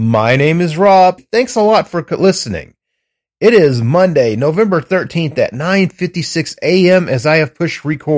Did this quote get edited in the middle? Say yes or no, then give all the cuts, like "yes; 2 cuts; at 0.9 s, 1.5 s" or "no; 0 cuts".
yes; 1 cut; at 1.2 s